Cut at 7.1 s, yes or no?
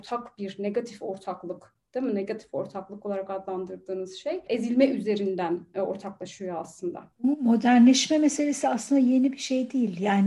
yes